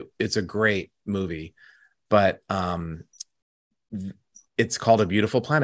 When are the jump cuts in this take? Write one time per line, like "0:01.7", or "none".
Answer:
none